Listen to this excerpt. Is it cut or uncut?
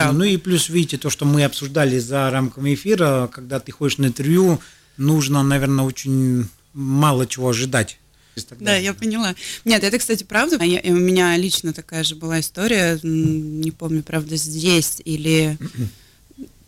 cut